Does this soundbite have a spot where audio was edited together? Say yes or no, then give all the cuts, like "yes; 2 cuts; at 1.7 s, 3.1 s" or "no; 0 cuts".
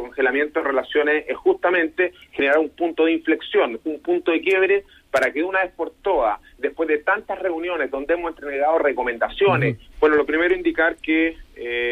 yes; 1 cut; at 9.9 s